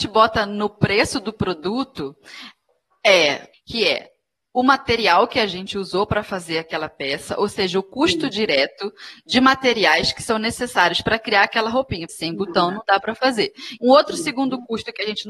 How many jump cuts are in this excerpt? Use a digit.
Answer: 3